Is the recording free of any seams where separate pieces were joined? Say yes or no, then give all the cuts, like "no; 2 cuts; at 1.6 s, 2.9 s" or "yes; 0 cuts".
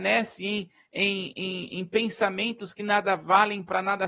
yes; 0 cuts